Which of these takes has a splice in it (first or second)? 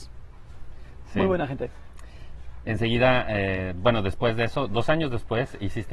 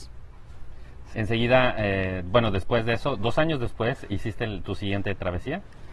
second